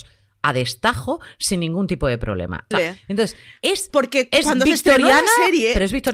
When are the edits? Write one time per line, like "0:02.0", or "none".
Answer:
0:02.7